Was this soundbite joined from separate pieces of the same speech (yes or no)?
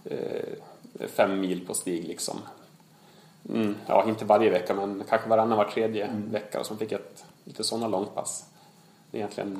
no